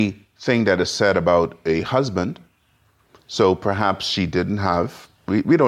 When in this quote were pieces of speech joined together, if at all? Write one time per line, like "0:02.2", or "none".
none